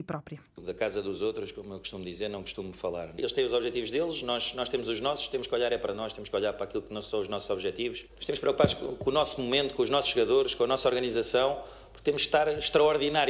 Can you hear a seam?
yes; 1 cut; at 8.1 s

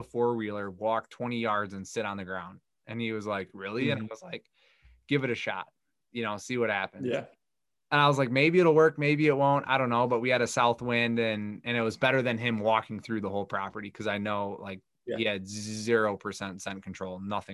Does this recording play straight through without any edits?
yes; 0 cuts

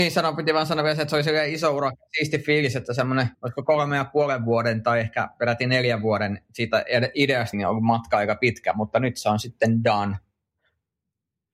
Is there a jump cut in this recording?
yes; 2 cuts; at 3.3 s, 7.5 s

